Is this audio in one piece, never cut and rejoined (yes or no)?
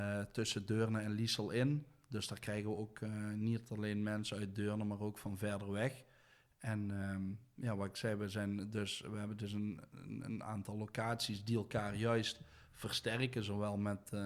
yes